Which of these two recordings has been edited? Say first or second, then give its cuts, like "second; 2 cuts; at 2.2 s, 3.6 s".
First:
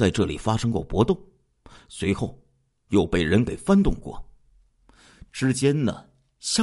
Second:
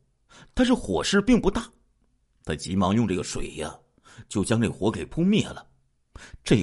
first; 1 cut; at 5.3 s